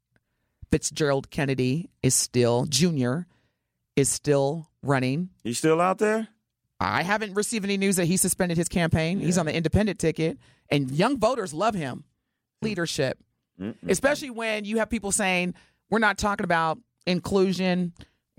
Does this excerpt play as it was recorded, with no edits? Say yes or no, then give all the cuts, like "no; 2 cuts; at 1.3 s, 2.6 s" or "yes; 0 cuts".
no; 1 cut; at 12.6 s